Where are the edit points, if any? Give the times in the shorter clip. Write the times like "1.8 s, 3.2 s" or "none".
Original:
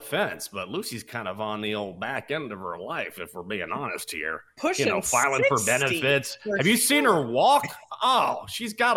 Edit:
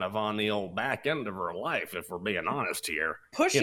none